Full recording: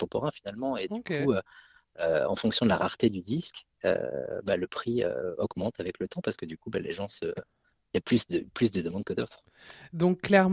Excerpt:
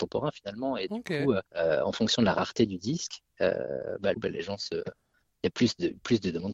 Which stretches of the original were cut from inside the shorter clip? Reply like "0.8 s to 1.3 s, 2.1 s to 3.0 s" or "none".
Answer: 1.5 s to 1.9 s, 4.6 s to 6.6 s